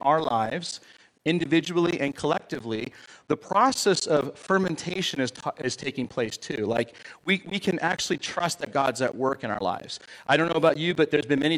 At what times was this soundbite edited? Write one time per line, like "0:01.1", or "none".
none

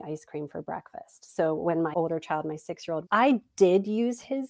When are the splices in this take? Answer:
0:03.0

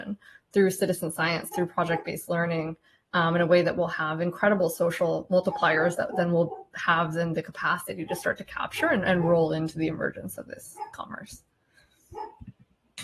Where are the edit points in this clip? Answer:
none

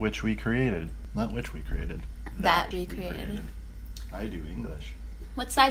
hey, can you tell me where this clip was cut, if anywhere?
0:02.7

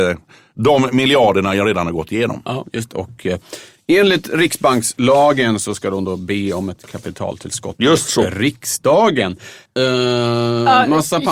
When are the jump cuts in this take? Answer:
0:02.9
0:09.7

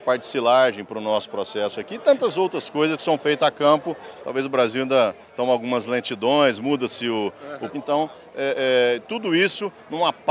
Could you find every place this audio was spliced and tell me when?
0:04.2
0:07.7

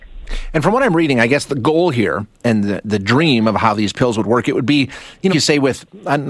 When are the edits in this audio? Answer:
0:05.3

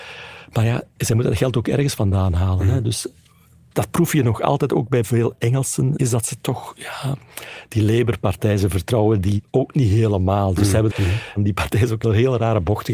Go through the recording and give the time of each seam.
0:06.0
0:10.9
0:12.0

